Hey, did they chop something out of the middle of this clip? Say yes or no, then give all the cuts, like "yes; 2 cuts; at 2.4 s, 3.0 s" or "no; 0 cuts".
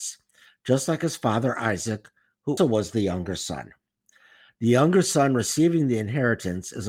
yes; 1 cut; at 2.6 s